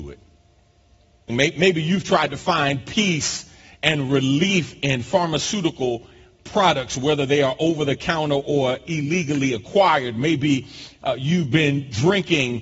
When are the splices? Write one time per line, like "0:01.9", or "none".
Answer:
0:01.3